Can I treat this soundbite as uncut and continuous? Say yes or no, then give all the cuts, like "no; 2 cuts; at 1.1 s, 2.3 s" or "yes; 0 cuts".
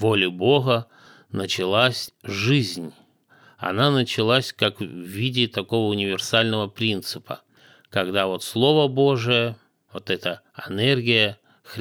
yes; 0 cuts